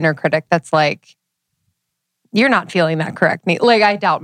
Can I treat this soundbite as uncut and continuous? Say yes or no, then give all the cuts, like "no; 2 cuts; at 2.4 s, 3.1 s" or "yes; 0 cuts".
yes; 0 cuts